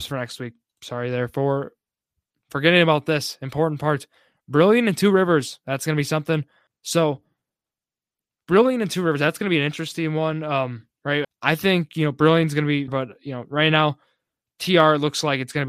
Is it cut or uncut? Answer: cut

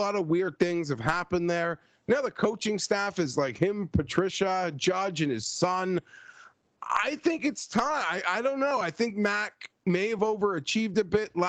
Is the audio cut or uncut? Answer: uncut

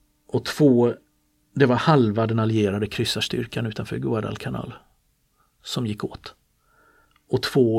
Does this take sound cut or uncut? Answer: uncut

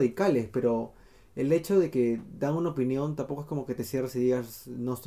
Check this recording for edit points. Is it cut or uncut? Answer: uncut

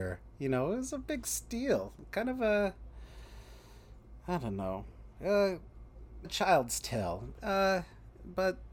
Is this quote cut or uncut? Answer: cut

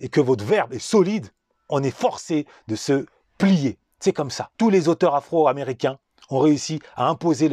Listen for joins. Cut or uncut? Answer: cut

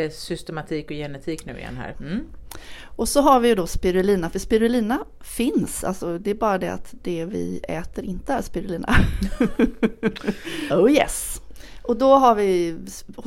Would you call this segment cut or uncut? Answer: cut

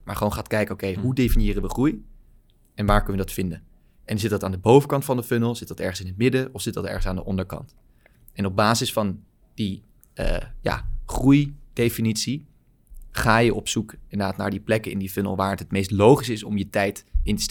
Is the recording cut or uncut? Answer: uncut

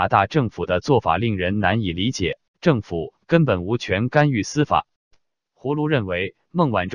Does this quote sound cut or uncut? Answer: cut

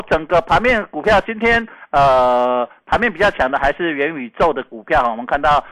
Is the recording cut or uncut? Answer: uncut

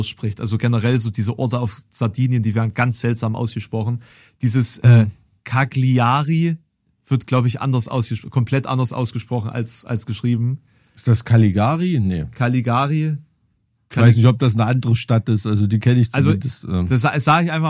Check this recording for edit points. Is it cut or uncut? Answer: uncut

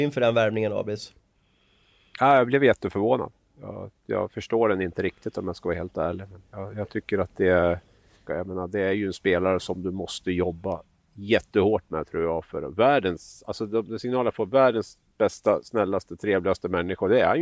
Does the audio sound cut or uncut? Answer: cut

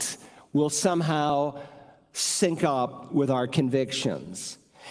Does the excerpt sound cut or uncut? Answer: uncut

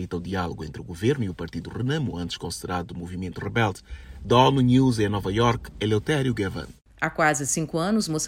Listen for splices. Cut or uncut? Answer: uncut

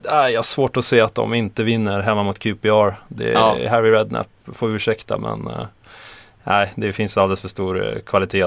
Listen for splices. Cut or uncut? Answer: uncut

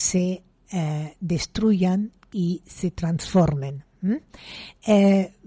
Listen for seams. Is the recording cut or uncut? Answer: uncut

